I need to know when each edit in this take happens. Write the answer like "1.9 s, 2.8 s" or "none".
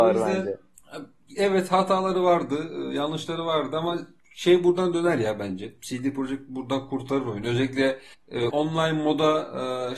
8.5 s